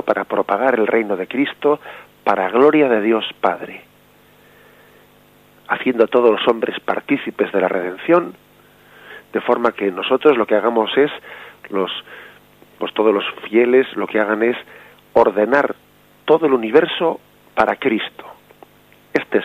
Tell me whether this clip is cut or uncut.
uncut